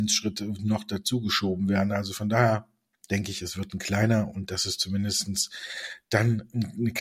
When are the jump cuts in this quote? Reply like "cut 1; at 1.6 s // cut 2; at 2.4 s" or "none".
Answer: none